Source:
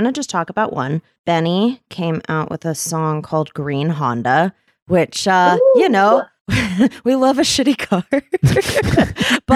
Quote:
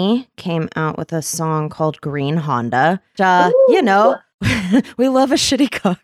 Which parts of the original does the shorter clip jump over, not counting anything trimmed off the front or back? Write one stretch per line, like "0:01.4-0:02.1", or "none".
0:04.7-0:05.2